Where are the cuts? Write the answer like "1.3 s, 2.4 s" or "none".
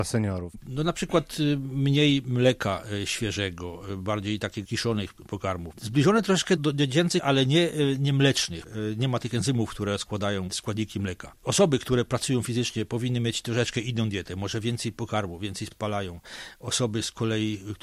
11.4 s